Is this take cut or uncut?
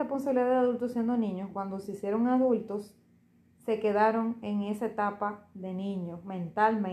uncut